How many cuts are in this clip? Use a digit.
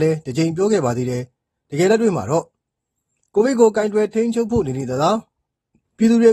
0